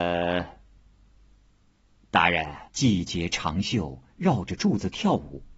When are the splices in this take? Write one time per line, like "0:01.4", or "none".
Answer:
0:02.7